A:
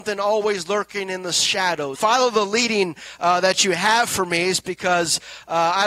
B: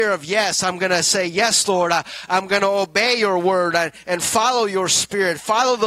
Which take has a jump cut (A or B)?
A